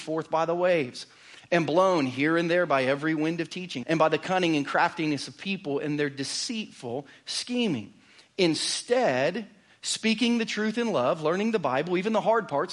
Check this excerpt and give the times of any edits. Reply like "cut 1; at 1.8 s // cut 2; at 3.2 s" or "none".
cut 1; at 3.8 s